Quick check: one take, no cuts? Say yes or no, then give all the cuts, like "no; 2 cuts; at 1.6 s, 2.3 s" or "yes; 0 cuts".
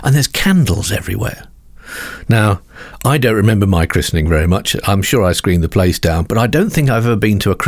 yes; 0 cuts